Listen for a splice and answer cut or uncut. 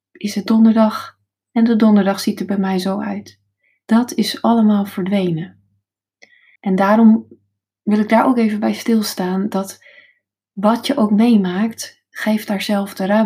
cut